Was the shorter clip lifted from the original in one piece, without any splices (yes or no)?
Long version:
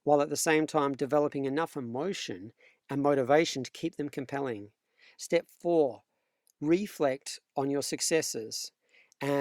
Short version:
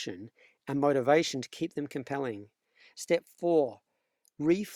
yes